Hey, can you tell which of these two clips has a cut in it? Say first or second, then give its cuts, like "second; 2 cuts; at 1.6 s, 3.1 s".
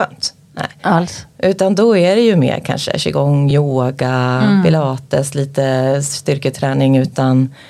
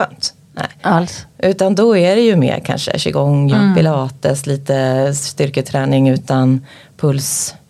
second; 1 cut; at 3.5 s